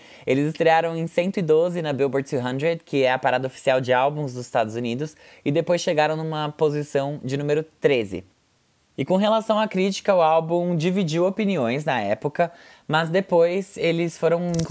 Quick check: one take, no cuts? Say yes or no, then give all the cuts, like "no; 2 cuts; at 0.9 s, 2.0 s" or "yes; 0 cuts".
yes; 0 cuts